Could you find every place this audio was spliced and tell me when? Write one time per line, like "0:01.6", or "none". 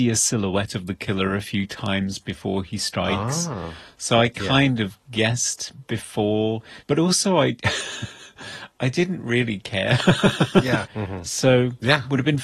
0:10.9

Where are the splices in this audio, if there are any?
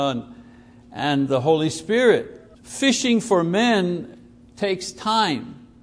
0:02.5

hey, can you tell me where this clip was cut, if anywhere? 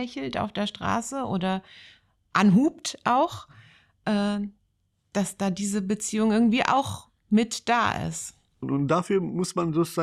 0:08.6

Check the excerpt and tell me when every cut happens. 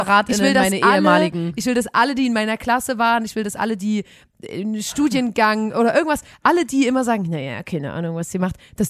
none

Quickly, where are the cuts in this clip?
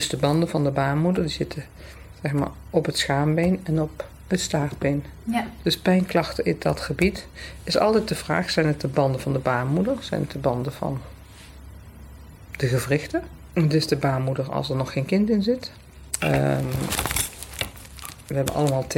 0:13.5
0:16.2

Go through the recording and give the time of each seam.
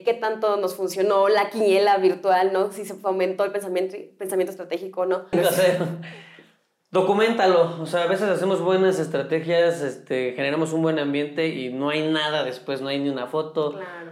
0:05.3

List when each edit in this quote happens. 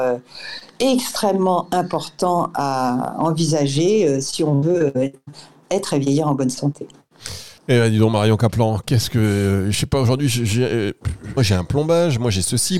0:07.6
0:11.4

